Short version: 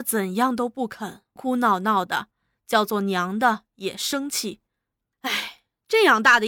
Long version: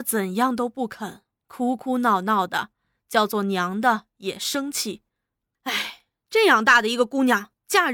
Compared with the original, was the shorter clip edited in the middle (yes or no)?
yes